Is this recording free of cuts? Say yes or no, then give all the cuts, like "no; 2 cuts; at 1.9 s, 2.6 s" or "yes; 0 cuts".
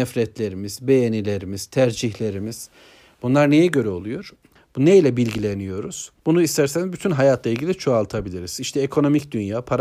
no; 2 cuts; at 4.6 s, 6.2 s